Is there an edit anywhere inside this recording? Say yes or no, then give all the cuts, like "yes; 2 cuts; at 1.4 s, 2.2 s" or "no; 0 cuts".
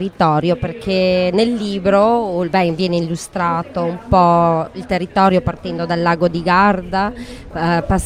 no; 0 cuts